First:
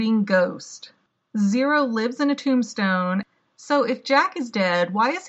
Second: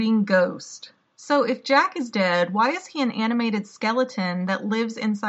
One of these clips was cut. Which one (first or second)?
second